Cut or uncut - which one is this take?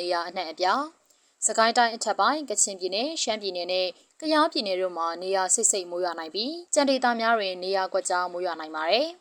cut